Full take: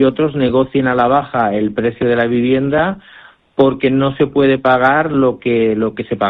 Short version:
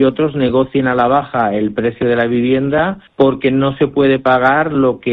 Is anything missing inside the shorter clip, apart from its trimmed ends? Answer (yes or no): yes